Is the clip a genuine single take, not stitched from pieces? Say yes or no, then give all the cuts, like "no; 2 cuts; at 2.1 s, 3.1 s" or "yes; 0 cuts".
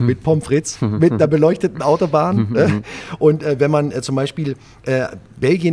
yes; 0 cuts